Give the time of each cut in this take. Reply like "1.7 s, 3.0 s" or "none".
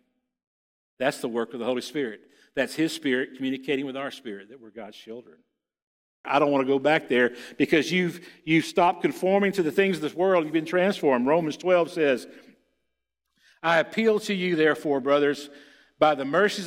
6.2 s